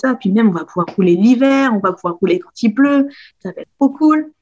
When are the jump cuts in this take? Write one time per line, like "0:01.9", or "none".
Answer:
none